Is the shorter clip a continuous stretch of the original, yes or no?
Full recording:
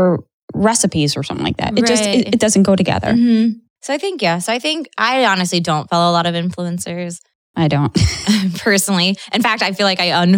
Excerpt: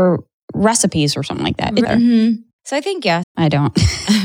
no